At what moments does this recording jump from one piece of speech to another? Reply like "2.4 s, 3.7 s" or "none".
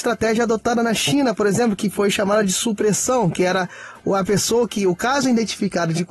none